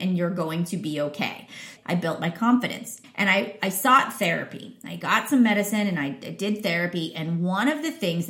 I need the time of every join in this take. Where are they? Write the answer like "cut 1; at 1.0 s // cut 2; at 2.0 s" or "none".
cut 1; at 1.8 s // cut 2; at 3.0 s